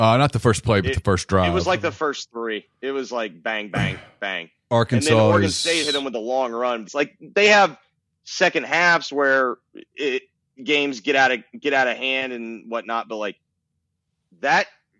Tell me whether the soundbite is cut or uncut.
cut